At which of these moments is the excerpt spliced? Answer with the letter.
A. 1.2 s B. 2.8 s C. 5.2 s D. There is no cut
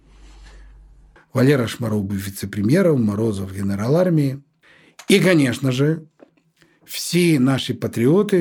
A